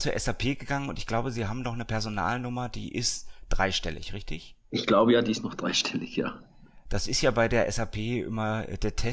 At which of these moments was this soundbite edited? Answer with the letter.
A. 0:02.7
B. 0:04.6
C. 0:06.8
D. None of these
B